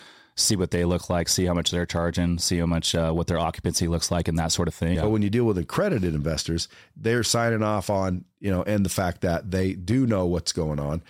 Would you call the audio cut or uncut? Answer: cut